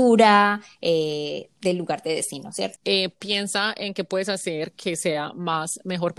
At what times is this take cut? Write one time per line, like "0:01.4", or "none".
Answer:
0:02.8